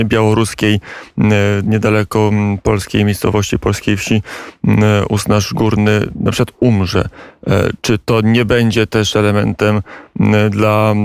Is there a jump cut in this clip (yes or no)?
no